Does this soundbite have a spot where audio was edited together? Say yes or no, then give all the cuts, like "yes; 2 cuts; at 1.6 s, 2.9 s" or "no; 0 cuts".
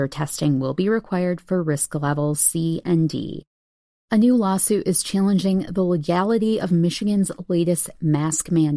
no; 0 cuts